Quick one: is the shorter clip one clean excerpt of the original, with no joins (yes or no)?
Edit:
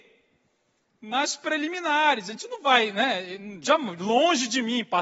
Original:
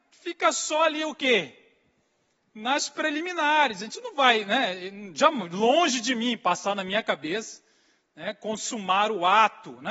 yes